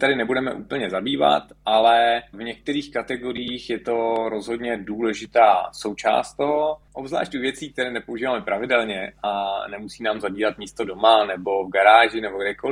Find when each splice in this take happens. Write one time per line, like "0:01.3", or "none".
none